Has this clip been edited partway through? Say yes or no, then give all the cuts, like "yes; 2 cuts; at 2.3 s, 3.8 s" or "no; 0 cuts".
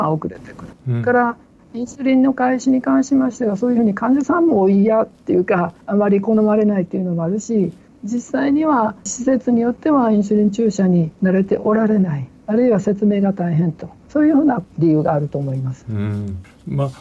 no; 0 cuts